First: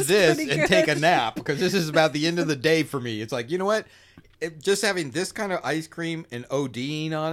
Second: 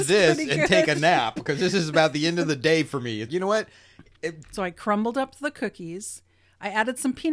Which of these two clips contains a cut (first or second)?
second